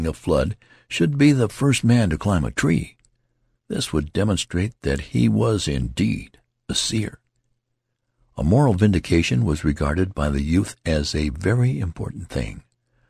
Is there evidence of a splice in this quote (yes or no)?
no